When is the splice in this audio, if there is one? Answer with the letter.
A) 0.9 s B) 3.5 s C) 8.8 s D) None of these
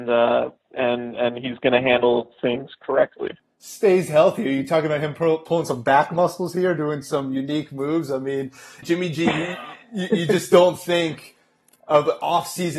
C